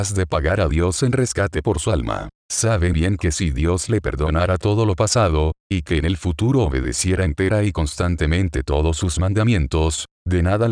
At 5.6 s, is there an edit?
yes; 2 cuts; at 2.9 s, 5.6 s

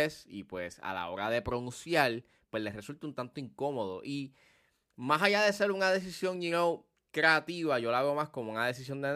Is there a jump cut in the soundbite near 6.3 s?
no; 0 cuts

